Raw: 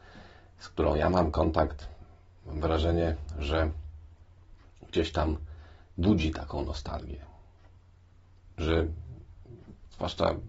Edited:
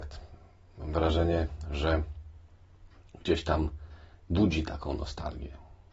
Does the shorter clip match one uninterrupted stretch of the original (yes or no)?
yes